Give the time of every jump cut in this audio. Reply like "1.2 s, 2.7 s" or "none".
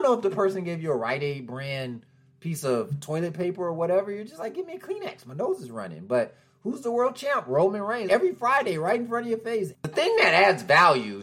8.1 s, 9.7 s

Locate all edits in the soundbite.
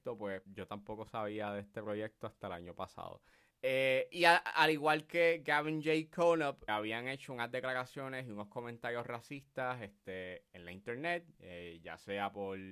3.5 s, 6.7 s

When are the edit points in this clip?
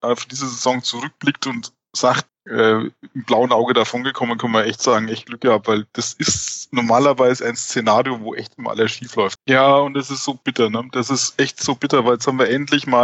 2.3 s, 9.4 s

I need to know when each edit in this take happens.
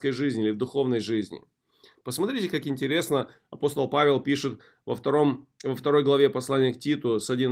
none

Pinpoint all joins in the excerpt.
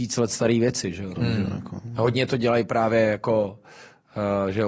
1.2 s

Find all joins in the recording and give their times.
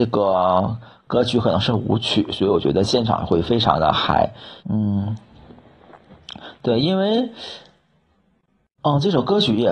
4.6 s

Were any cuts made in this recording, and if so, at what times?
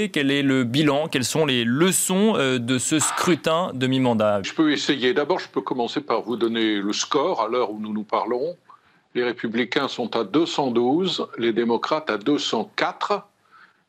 4.4 s

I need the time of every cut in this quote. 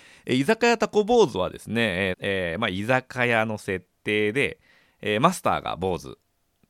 2.1 s

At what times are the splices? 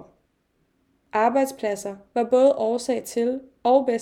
1.1 s

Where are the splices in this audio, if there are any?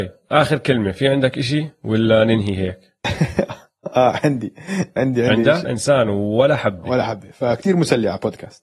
5.6 s

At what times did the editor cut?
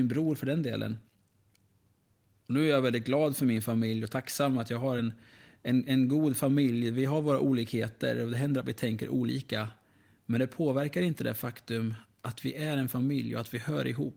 none

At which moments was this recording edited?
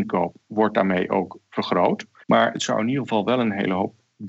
2.2 s

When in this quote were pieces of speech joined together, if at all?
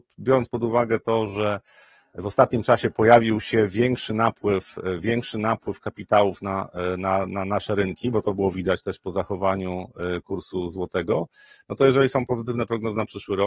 none

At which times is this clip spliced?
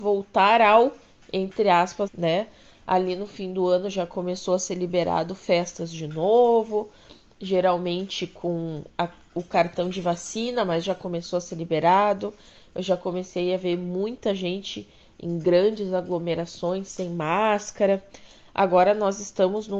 2.1 s

